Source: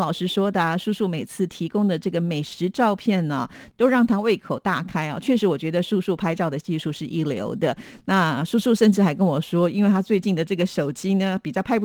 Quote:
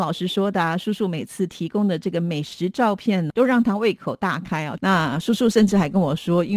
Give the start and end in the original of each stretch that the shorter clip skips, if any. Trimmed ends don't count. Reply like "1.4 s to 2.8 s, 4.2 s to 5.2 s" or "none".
3.3 s to 3.7 s, 5.2 s to 8.0 s